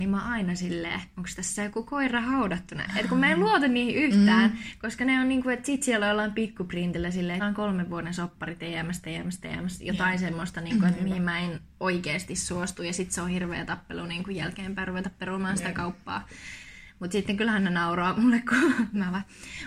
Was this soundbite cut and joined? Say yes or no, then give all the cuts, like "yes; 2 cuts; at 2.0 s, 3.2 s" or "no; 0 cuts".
yes; 2 cuts; at 1.1 s, 7.4 s